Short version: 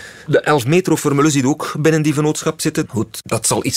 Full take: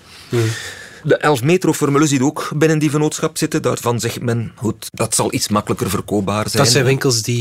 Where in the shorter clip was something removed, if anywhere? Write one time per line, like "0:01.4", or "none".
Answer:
0:02.9